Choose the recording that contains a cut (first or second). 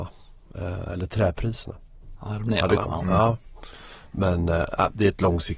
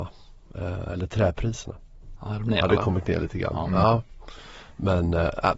first